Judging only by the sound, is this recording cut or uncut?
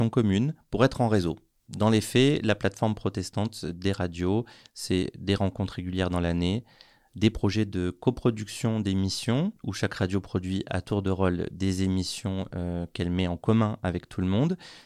cut